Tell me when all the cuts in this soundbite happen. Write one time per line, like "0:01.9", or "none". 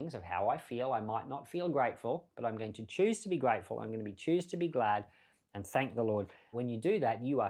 0:06.5